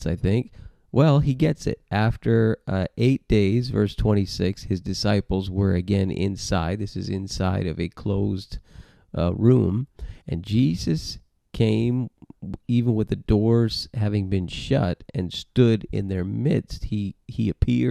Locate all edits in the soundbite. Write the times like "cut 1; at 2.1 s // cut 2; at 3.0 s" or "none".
cut 1; at 10.2 s